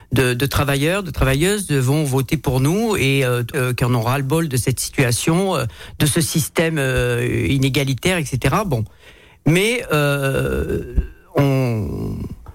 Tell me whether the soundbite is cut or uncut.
cut